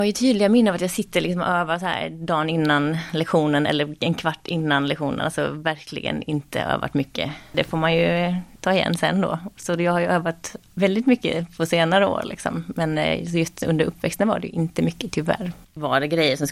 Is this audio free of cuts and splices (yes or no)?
yes